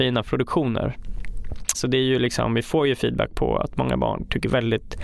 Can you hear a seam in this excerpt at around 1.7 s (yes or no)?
yes